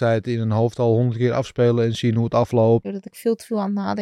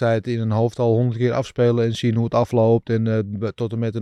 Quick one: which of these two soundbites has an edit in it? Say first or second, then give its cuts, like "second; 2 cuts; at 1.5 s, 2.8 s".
first; 1 cut; at 2.8 s